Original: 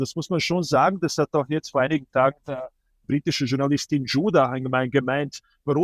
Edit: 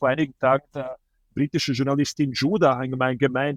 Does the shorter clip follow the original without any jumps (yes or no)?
yes